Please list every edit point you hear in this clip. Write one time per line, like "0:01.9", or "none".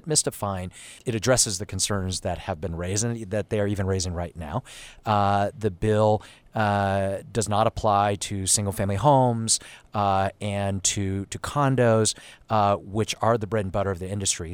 0:01.0